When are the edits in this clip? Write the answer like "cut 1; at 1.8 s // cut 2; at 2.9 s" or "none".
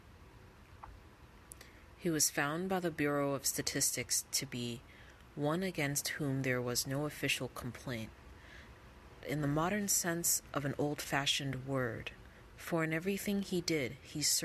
cut 1; at 9.2 s // cut 2; at 12.5 s